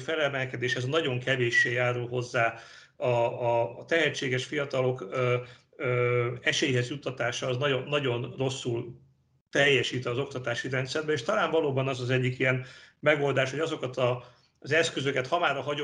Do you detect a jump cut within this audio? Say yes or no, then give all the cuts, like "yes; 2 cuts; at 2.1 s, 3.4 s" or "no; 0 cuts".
no; 0 cuts